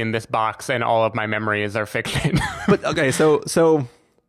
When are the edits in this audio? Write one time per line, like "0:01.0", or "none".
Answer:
none